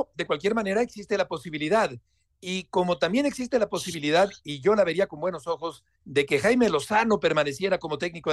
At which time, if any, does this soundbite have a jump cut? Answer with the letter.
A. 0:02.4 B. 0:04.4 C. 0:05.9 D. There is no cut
C